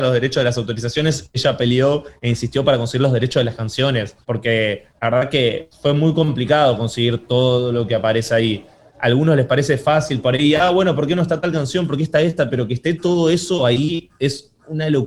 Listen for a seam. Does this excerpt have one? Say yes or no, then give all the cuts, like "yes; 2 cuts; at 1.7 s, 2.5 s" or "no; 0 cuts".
yes; 1 cut; at 4.2 s